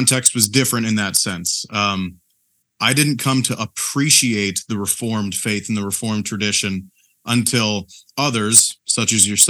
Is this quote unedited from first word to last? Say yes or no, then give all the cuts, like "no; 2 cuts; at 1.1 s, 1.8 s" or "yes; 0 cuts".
yes; 0 cuts